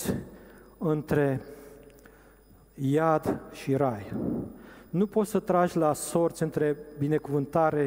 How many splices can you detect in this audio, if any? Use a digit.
0